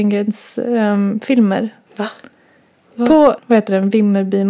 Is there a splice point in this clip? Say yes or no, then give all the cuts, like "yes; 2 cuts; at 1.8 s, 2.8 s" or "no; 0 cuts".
yes; 2 cuts; at 1.9 s, 3.4 s